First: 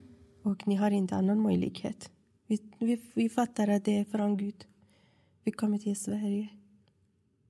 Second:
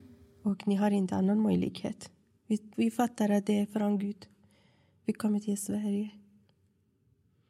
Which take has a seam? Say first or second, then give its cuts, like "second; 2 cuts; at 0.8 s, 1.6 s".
second; 1 cut; at 2.7 s